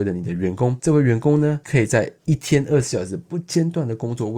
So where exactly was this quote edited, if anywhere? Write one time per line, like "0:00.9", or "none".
none